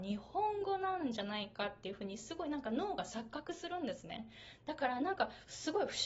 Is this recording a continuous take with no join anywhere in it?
yes; 0 cuts

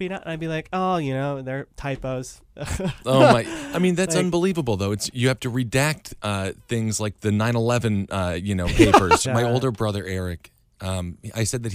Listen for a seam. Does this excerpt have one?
yes; 1 cut; at 9.2 s

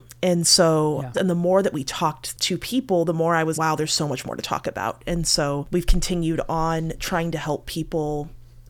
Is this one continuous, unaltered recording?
no; 2 cuts; at 1.1 s, 3.5 s

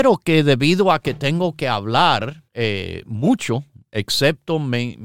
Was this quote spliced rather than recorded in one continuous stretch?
yes; 1 cut; at 2.5 s

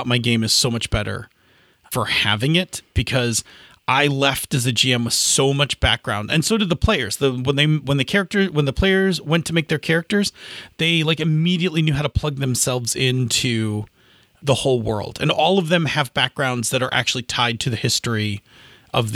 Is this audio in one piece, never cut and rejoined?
yes; 0 cuts

